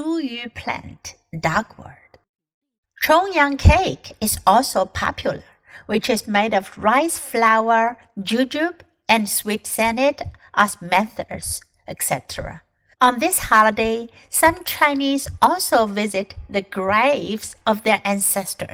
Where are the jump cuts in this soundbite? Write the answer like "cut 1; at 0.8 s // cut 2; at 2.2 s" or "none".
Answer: cut 1; at 12.9 s